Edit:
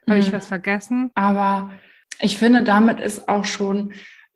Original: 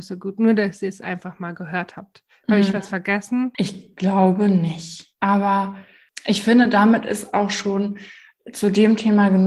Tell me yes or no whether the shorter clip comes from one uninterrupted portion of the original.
no